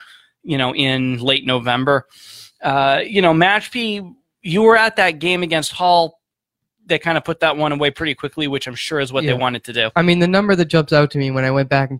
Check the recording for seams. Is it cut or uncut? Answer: uncut